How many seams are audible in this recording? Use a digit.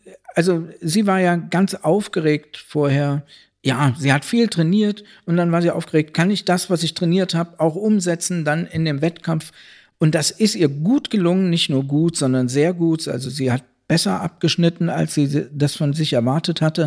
0